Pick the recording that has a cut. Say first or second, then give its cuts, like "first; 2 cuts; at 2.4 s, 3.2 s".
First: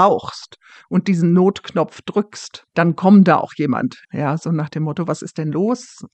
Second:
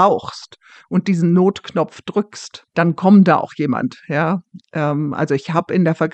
first; 1 cut; at 4.0 s